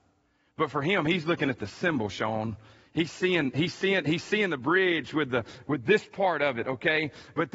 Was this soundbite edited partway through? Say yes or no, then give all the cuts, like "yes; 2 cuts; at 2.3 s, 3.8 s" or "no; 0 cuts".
no; 0 cuts